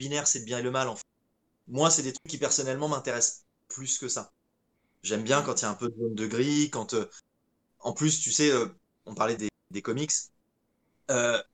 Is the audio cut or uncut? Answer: cut